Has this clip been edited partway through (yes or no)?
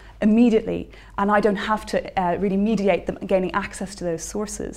no